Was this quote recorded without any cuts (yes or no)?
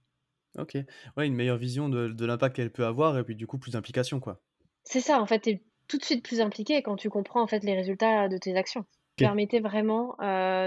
no